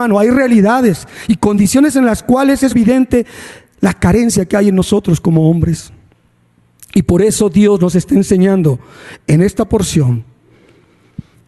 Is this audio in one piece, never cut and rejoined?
no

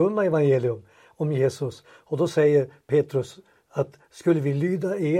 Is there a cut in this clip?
yes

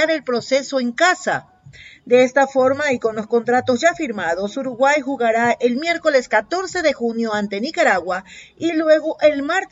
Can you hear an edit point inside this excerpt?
no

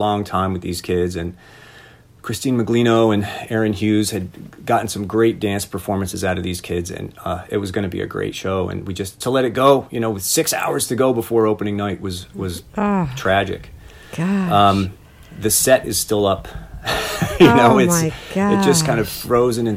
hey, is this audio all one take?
no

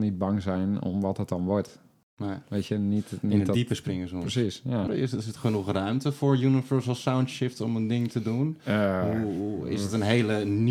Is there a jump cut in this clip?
yes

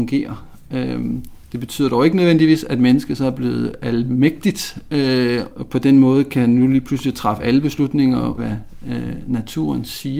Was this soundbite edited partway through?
yes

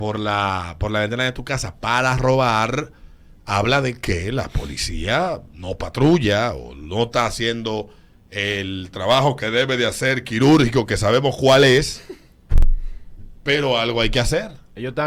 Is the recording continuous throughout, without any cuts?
yes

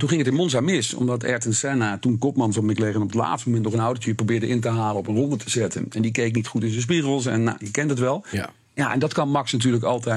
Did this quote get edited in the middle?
no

